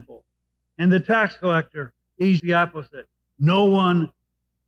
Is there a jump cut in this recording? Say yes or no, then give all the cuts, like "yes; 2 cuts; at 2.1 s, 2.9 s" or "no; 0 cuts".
yes; 1 cut; at 2.4 s